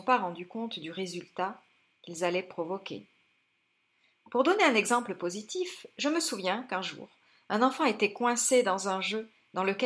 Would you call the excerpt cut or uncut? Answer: uncut